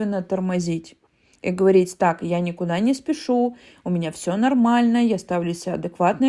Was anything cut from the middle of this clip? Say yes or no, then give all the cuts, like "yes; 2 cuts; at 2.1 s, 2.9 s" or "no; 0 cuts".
no; 0 cuts